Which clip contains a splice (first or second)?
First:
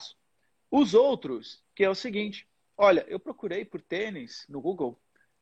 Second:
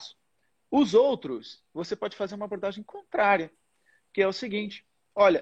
first